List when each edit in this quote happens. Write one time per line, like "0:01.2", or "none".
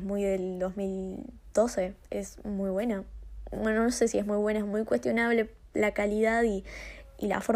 none

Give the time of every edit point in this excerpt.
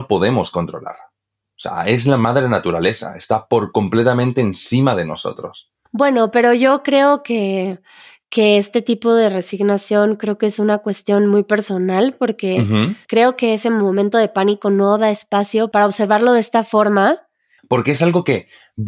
0:05.9
0:17.6

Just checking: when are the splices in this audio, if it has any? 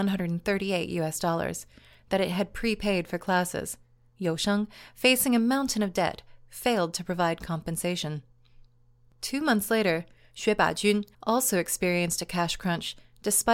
0:11.1

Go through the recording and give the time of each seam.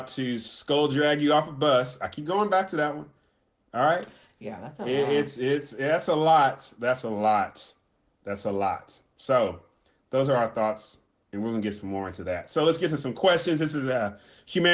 none

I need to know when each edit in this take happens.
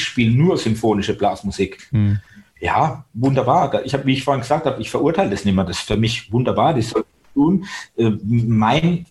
none

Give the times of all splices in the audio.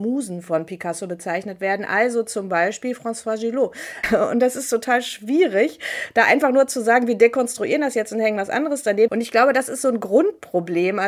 0:04.0
0:09.1

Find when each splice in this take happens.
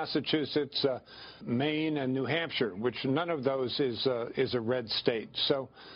0:01.4

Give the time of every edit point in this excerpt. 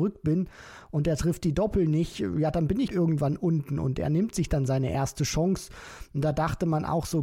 0:02.9

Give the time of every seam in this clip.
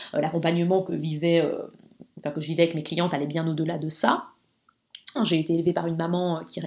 0:05.2

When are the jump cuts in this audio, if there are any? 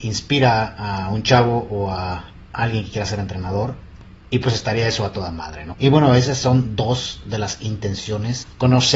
0:05.7

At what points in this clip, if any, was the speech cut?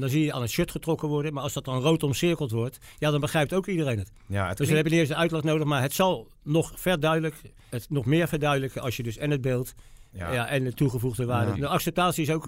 0:07.7
0:11.5

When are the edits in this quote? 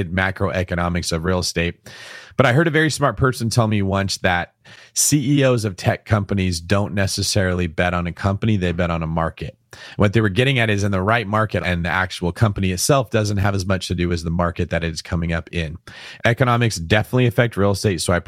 0:11.6
0:16.2

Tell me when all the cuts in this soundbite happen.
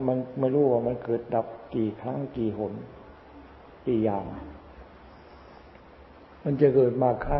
none

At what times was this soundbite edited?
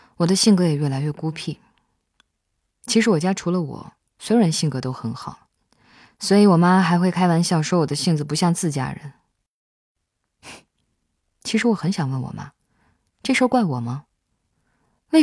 none

